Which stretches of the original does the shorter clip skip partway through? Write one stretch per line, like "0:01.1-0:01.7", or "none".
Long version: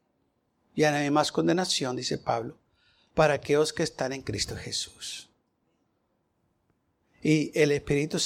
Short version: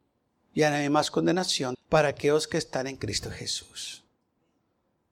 0:02.0-0:03.0